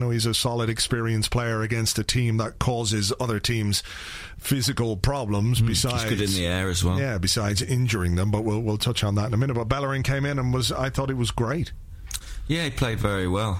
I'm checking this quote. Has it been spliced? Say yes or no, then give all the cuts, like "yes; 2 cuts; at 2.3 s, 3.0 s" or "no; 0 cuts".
no; 0 cuts